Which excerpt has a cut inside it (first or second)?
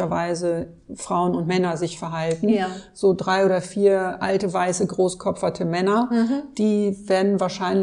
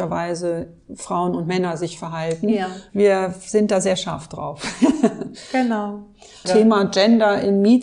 second